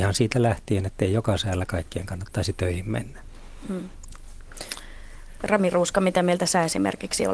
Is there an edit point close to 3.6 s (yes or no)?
no